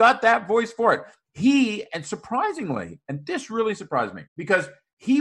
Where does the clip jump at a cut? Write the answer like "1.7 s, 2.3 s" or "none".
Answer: 4.3 s